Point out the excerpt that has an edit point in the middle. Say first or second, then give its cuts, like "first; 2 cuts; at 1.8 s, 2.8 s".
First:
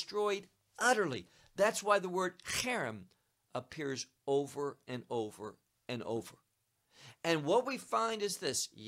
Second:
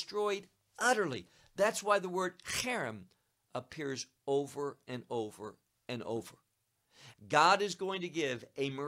second; 1 cut; at 7.1 s